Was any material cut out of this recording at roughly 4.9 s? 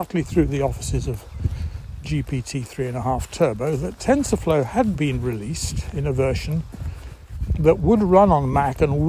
yes; 1 cut; at 4.9 s

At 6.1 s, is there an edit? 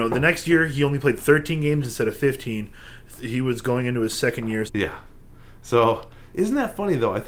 no; 2 cuts; at 3.2 s, 4.7 s

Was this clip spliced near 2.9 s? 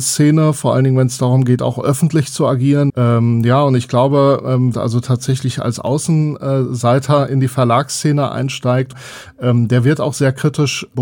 yes; 2 cuts; at 2.9 s, 4.7 s

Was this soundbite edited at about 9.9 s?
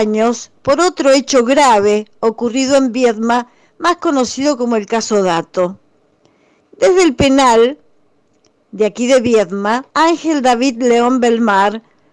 yes; 2 cuts; at 6.6 s, 9.9 s

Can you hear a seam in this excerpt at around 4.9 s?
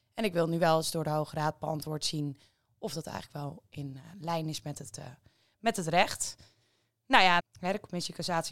no; 1 cut; at 7.4 s

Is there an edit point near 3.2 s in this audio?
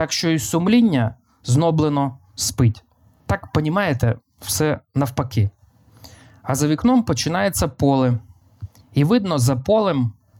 yes; 1 cut; at 3.2 s

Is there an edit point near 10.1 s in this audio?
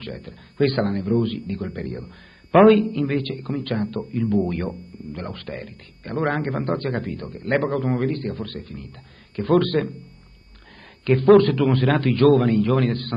no; 0 cuts

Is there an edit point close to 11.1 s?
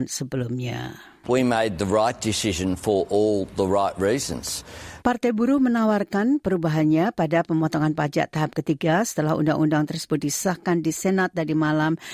no; 2 cuts; at 1.2 s, 5.0 s

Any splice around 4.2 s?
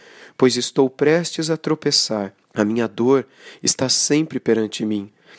no; 1 cut; at 2.4 s

